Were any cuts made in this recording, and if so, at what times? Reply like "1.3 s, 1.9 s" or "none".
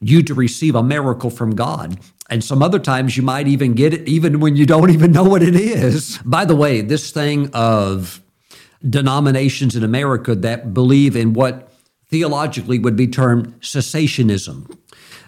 6.2 s, 8.8 s